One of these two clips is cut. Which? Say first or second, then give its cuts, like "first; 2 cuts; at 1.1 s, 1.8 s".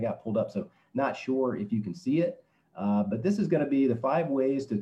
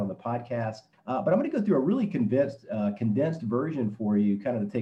second; 1 cut; at 0.9 s